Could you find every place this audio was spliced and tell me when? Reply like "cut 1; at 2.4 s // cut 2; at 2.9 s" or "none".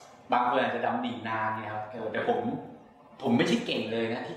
none